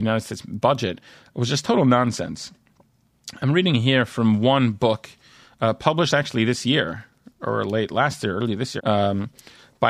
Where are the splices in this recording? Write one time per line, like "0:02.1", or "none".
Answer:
0:08.8